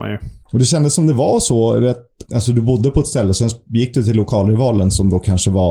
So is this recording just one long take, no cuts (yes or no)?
no